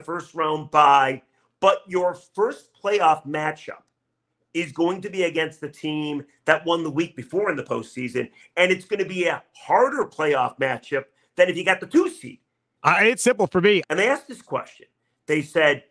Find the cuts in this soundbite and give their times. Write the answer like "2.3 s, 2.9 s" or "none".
12.8 s, 13.8 s